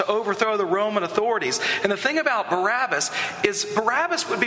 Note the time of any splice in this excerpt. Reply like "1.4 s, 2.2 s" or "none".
none